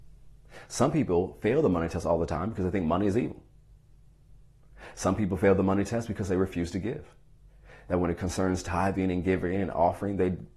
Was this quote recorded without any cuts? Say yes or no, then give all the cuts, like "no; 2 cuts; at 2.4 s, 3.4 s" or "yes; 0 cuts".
yes; 0 cuts